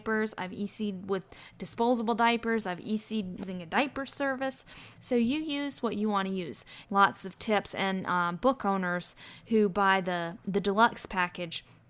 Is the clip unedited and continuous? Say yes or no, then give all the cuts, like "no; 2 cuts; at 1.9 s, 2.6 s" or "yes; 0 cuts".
no; 2 cuts; at 5.0 s, 6.8 s